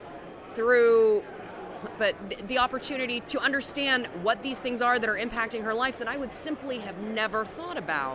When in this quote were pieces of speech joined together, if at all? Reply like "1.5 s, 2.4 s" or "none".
2.0 s, 3.2 s